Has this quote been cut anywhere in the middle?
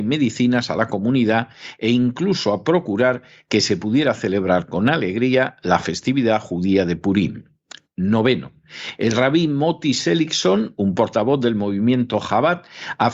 no; 0 cuts

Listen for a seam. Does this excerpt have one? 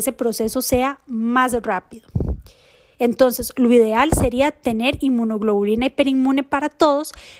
yes; 1 cut; at 2.9 s

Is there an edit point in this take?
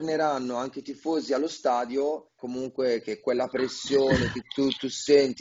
yes; 2 cuts; at 2.4 s, 4.4 s

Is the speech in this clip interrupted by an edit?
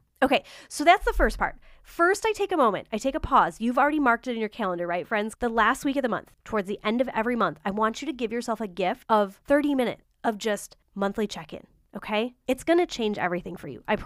yes; 1 cut; at 5.3 s

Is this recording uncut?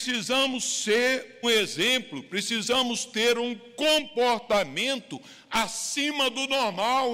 no; 1 cut; at 1.4 s

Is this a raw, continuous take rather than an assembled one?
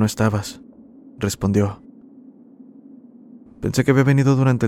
yes; 0 cuts

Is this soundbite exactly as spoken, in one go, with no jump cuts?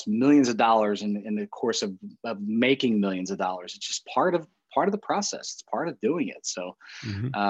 yes; 0 cuts

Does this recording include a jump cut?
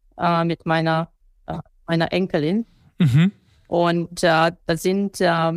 no; 0 cuts

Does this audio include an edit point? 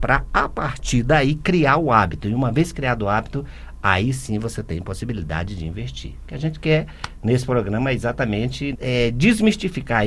yes; 1 cut; at 8.7 s

